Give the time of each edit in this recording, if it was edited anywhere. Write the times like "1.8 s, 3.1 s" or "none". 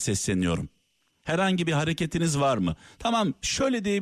1.1 s